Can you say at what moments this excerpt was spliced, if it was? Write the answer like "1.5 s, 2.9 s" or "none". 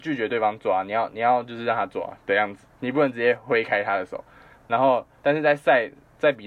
4.6 s